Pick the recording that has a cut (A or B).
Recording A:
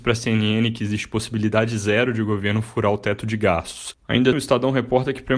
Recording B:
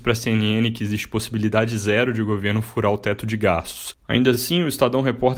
A